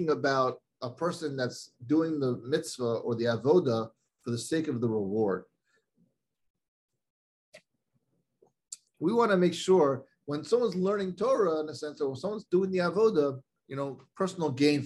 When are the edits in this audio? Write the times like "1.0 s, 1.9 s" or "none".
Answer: 8.9 s, 13.6 s